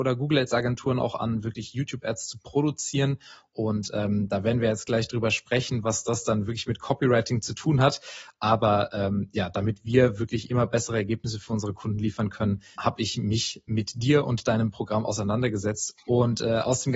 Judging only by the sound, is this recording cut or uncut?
cut